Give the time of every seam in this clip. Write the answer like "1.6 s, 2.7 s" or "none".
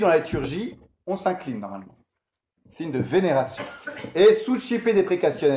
none